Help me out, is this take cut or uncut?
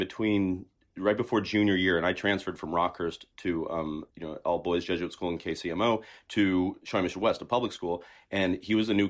uncut